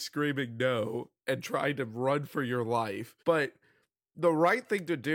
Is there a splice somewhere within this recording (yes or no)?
yes